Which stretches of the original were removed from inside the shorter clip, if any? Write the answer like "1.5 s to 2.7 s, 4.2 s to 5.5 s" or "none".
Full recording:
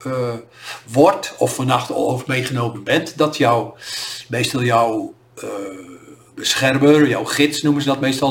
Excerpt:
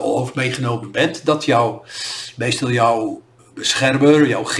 5.3 s to 6.2 s